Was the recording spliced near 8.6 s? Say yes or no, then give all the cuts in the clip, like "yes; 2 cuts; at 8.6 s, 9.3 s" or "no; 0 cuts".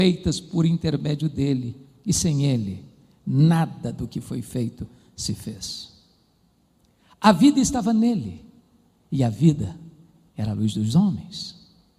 no; 0 cuts